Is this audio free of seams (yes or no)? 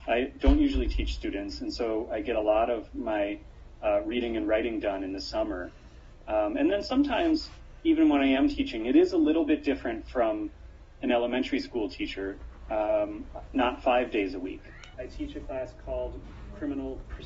no